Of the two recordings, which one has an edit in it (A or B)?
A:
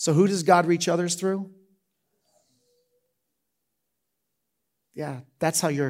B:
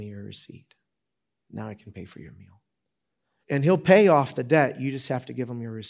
B